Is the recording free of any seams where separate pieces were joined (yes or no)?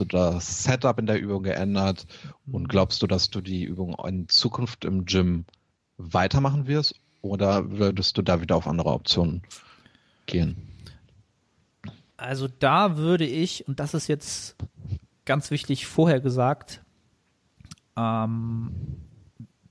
yes